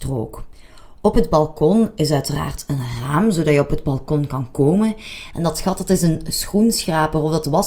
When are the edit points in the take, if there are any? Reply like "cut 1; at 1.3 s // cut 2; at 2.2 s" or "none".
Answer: cut 1; at 5.3 s